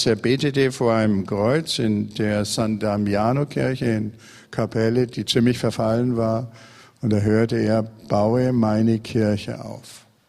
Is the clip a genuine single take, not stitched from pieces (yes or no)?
yes